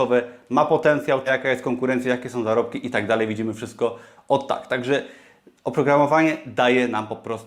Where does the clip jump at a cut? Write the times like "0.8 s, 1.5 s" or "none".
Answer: 1.3 s